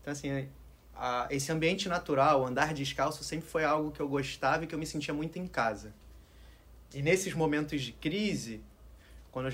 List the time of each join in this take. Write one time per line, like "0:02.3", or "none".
none